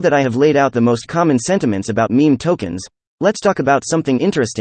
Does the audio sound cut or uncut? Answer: uncut